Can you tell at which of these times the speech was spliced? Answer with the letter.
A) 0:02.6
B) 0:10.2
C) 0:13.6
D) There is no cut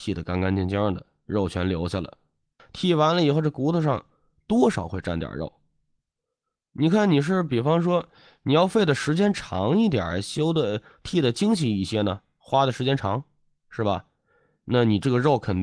A